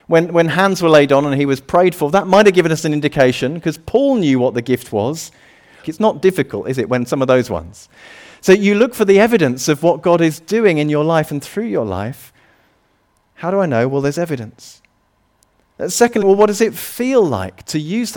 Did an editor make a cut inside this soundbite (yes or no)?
yes